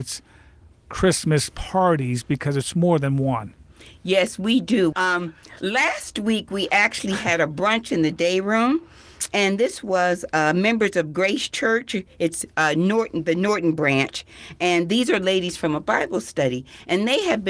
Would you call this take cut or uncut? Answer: cut